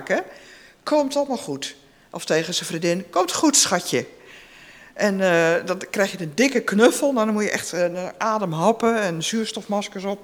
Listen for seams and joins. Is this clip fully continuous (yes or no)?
yes